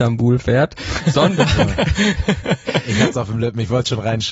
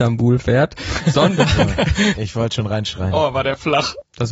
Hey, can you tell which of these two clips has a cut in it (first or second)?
second